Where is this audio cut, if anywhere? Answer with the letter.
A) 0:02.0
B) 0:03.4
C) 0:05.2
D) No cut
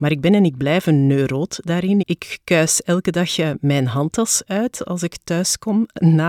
A